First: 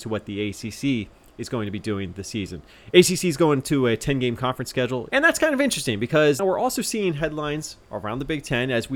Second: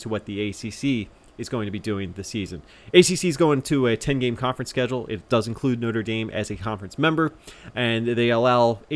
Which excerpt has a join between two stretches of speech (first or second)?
first